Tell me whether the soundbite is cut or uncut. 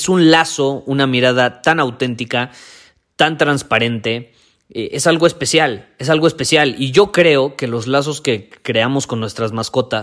uncut